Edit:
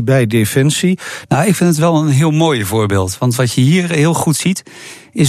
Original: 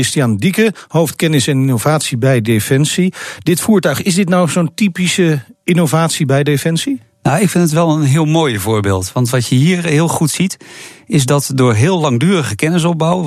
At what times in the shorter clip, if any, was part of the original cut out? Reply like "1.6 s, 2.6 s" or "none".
1.2 s

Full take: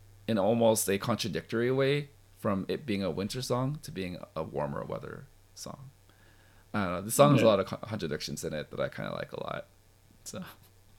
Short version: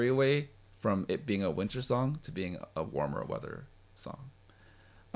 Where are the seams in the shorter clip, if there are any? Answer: none

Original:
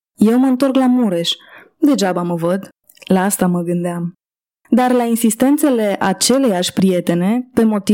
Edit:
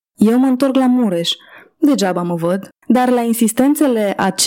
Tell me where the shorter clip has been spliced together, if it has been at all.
2.8 s

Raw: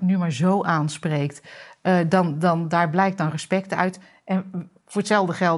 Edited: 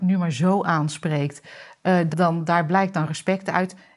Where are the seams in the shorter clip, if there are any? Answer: 2.1 s

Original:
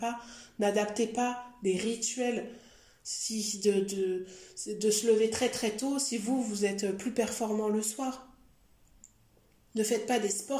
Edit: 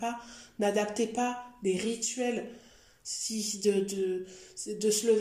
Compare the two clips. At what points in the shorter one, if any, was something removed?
none

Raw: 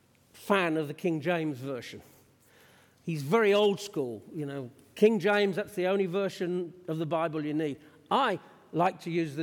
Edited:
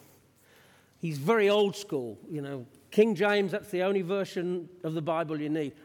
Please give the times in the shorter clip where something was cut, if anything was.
none

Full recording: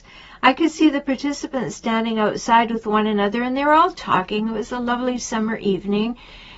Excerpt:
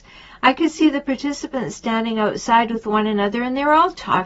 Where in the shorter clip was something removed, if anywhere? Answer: none

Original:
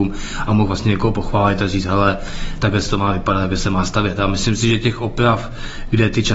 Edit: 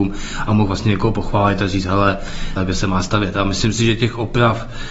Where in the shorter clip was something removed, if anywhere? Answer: 2.6 s

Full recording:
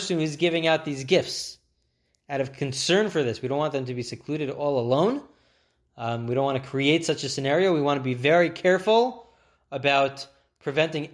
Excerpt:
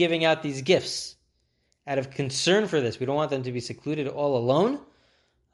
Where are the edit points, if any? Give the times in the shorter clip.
none

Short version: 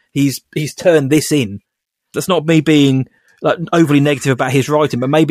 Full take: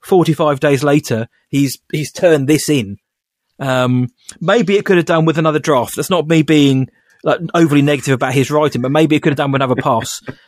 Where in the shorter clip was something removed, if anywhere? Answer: 2.1 s

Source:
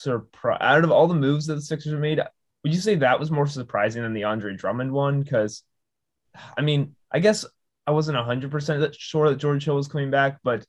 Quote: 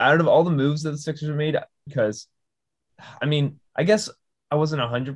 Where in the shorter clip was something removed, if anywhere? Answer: 1.9 s

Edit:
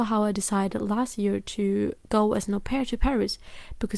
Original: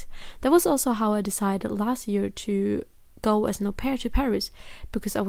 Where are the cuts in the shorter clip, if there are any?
2.0 s

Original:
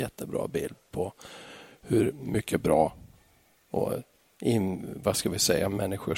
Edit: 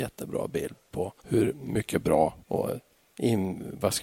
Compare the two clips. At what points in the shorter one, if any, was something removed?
1.2 s, 2.4 s

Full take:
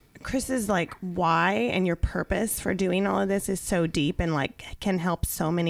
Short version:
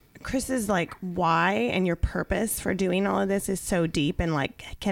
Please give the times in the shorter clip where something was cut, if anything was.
none

